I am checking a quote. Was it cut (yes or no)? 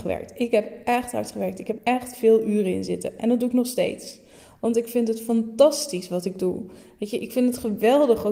yes